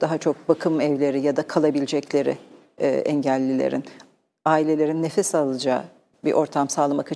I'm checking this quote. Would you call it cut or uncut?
uncut